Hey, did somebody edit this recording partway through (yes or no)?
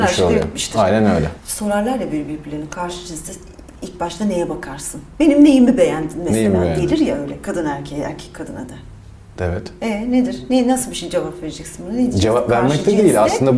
no